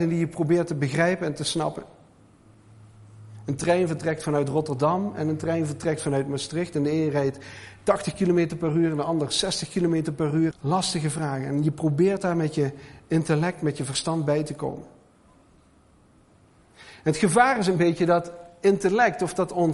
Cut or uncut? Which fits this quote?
cut